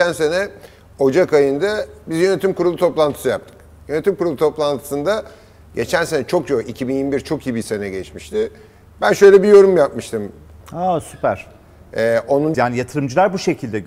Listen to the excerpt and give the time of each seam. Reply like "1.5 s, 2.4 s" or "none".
10.6 s, 12.5 s

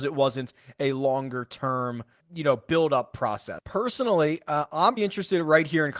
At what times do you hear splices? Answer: 2.2 s, 3.6 s, 5.0 s

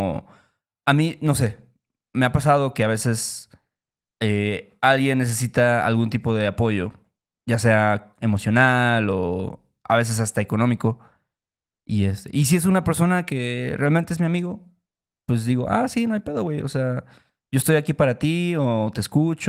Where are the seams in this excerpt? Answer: none

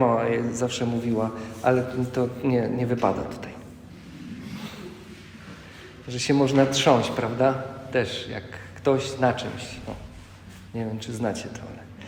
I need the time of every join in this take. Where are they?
none

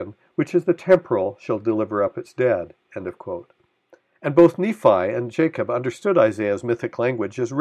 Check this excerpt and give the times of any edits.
none

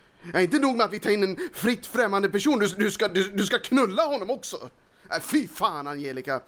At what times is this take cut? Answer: none

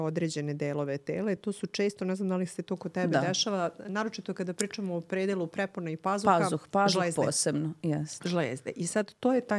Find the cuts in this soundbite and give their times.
none

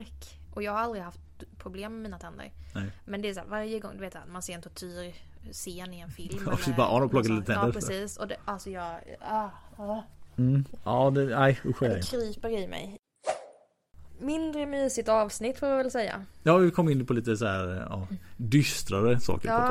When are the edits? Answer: none

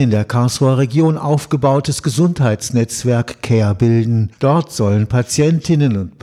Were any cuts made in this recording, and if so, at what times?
4.3 s

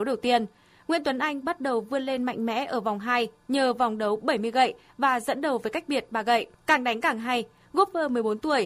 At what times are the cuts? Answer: 6.5 s

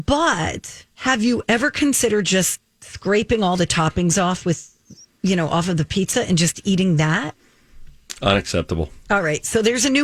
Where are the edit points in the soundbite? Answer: 0.9 s

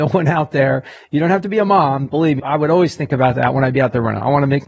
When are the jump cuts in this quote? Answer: 2.4 s

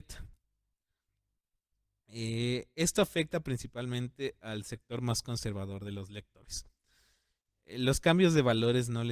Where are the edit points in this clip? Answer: none

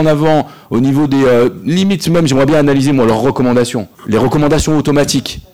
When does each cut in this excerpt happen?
4.0 s

